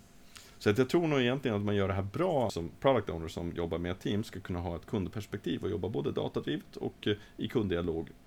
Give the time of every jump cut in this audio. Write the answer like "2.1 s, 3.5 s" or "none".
2.5 s